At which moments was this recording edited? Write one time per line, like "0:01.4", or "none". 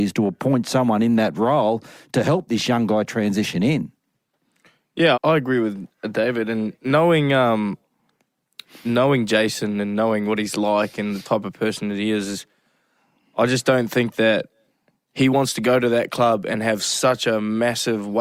0:05.1